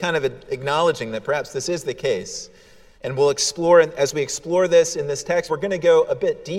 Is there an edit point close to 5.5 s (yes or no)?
yes